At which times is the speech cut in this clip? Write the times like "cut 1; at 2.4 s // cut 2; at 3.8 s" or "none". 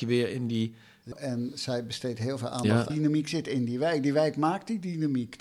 cut 1; at 1.1 s // cut 2; at 2.9 s